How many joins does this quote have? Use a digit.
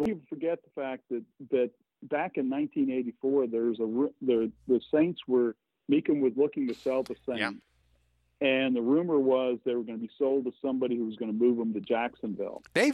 0